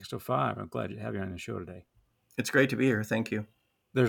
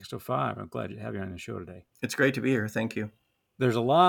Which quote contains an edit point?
second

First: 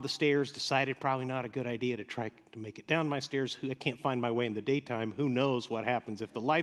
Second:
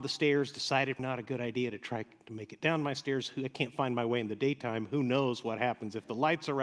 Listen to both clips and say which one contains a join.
second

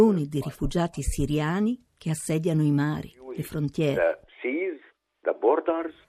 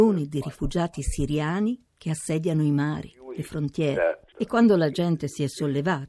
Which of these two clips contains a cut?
second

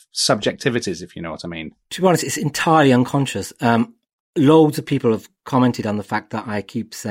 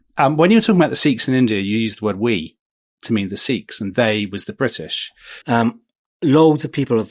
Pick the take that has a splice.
second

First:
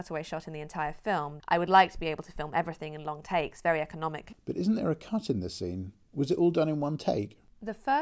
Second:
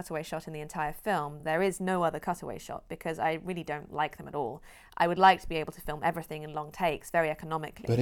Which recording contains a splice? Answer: first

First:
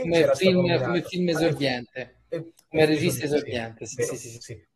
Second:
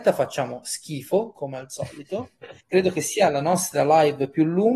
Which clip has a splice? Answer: second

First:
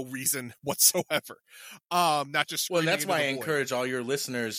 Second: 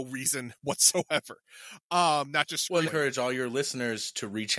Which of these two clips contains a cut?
second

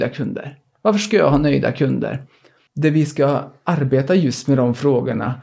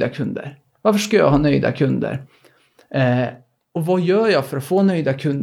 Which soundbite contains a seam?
first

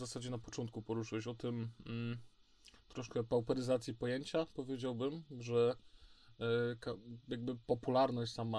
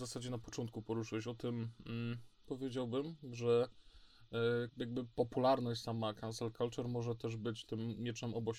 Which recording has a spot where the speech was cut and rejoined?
second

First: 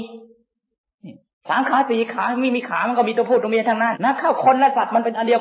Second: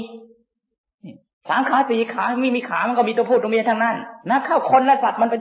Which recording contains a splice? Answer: first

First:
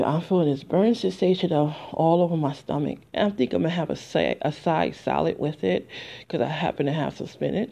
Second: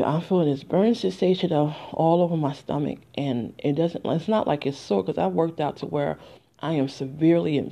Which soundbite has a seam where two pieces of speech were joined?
first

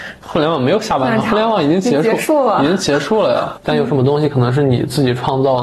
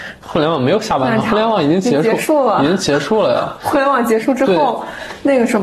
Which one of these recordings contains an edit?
first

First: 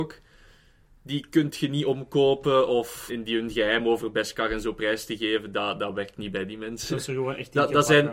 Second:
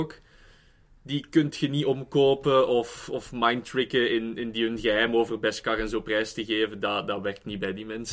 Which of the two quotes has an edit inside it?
first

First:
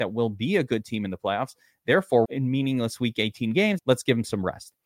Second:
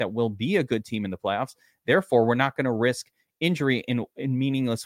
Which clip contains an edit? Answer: first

